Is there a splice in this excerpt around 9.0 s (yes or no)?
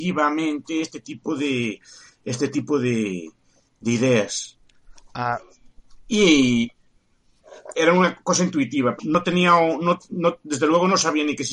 yes